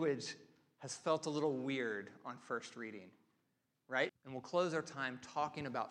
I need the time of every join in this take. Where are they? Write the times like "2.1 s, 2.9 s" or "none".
4.1 s